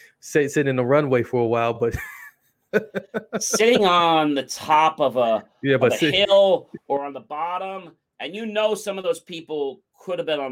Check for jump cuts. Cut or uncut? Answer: uncut